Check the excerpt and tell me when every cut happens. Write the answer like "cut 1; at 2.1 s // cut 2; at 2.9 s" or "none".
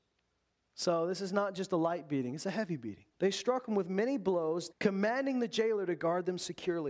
cut 1; at 3.1 s // cut 2; at 4.7 s